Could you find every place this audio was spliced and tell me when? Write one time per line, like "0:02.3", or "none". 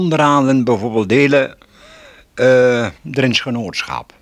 0:02.9